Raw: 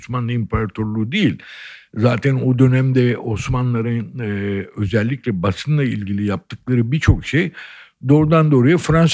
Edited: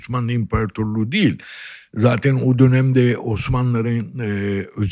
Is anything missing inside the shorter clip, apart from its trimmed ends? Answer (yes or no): no